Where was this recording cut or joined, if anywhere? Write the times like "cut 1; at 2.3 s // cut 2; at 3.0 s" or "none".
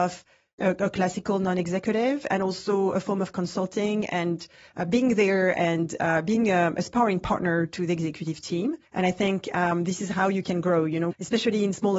cut 1; at 8.9 s // cut 2; at 11.1 s